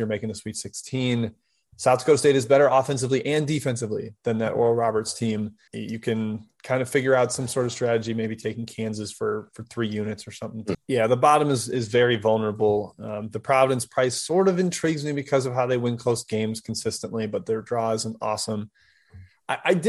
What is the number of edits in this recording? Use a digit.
2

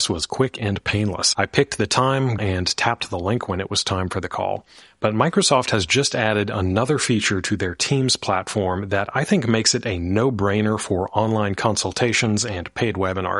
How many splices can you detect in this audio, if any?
1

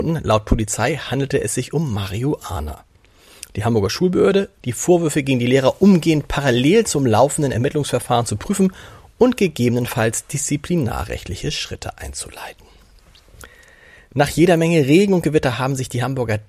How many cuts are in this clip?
1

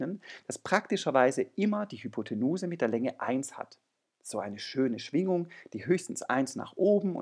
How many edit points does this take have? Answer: 1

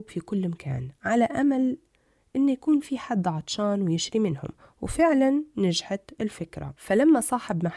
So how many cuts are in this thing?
1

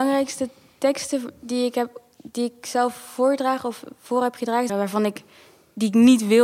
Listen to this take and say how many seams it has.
1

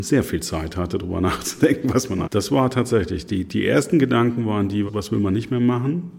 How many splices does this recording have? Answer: 2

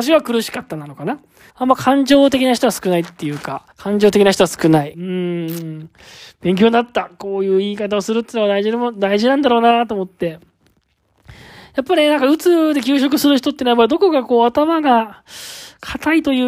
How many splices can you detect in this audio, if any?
3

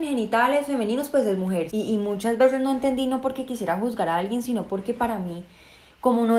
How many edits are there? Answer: 1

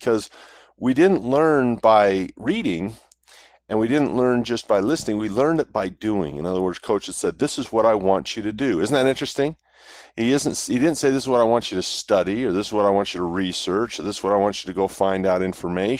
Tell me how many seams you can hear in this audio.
0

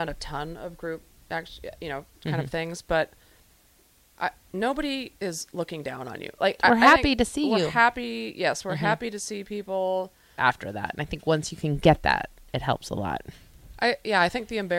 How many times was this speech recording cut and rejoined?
2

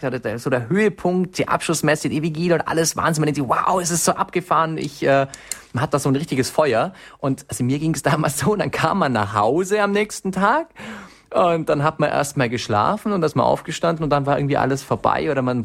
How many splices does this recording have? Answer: 0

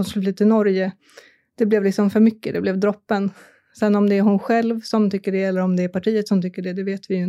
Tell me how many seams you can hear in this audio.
0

